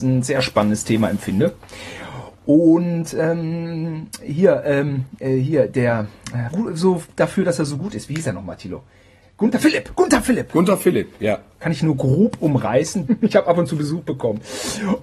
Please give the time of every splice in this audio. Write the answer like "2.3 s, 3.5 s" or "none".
6.5 s, 11.6 s, 13.1 s